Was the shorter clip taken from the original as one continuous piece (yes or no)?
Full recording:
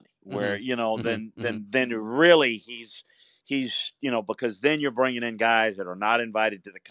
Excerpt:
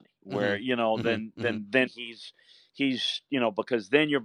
no